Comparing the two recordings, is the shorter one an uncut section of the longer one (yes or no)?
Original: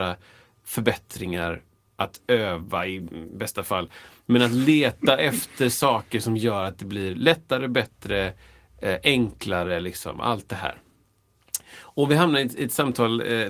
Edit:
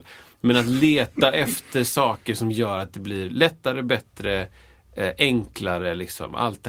yes